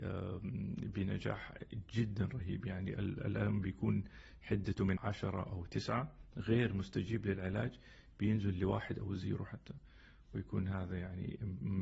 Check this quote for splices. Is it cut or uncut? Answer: cut